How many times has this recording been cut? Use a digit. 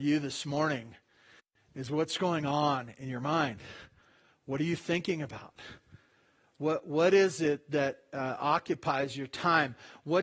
0